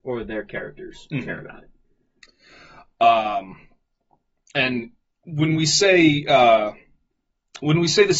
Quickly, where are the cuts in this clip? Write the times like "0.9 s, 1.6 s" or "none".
none